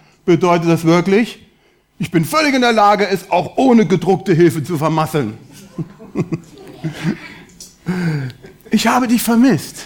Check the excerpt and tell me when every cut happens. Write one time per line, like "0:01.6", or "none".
none